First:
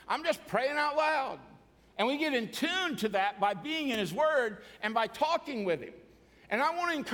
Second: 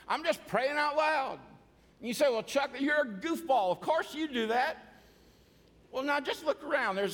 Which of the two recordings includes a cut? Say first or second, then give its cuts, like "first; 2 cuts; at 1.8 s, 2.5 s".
first; 1 cut; at 1.9 s